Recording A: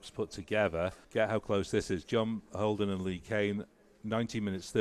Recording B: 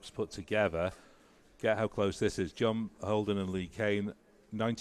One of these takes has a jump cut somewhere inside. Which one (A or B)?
A